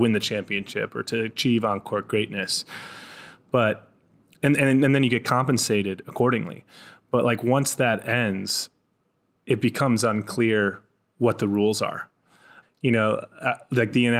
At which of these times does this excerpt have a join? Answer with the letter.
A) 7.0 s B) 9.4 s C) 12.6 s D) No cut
C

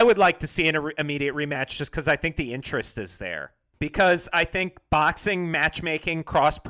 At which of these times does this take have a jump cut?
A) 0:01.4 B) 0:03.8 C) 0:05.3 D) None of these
B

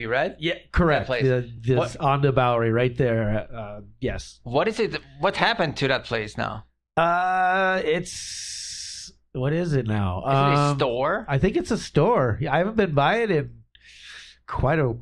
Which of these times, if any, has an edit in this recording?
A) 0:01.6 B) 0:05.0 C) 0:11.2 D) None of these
D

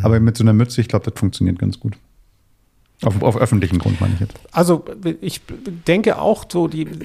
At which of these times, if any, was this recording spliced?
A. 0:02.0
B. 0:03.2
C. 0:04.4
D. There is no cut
C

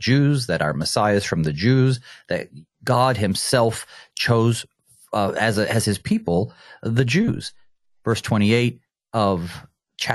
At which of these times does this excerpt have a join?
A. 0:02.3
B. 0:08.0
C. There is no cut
B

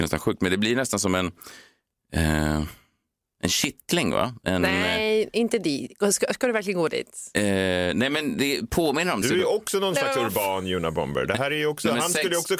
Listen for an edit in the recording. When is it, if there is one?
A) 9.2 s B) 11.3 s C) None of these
A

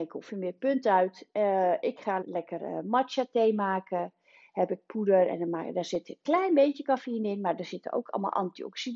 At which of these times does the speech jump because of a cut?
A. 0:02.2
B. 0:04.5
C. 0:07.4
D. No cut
A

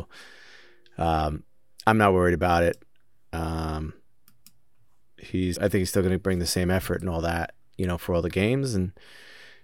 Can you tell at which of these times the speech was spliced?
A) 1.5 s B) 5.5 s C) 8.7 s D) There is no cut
B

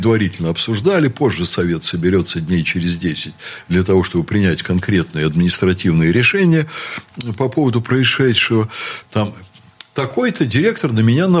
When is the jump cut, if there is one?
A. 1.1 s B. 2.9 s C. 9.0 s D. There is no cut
C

